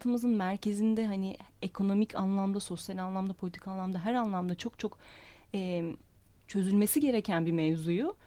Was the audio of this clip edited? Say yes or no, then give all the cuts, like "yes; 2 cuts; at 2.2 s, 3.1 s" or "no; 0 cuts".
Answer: no; 0 cuts